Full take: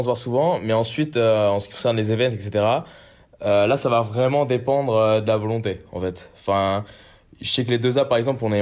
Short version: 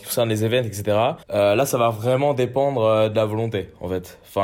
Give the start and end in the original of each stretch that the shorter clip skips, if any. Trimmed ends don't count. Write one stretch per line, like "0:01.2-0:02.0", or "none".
0:02.9-0:03.3